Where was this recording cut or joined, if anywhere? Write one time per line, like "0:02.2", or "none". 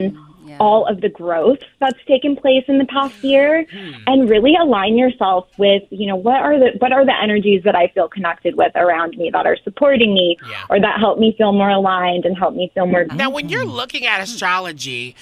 0:13.1